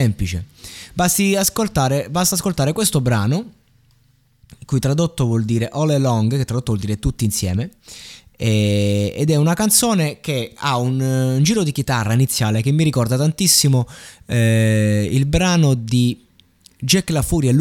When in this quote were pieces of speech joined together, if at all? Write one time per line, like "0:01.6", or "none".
none